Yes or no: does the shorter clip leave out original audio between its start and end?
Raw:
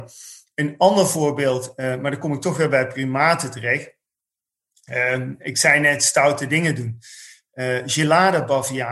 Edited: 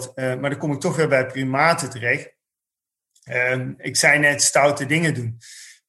no